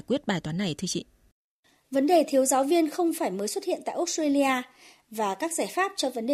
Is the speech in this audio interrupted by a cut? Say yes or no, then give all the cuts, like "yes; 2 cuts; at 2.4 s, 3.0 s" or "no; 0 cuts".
no; 0 cuts